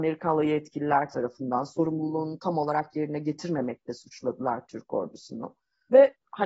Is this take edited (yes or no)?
no